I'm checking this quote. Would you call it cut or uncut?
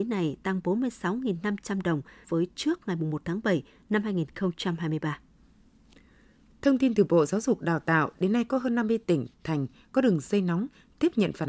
cut